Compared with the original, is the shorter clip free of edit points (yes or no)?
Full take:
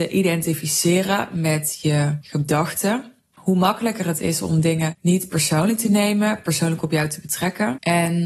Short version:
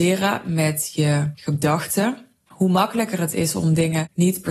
yes